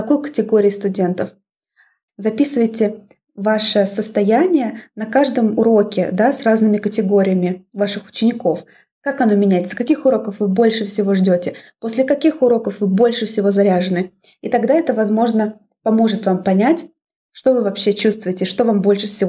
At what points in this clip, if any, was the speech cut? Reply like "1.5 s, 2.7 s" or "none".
2.1 s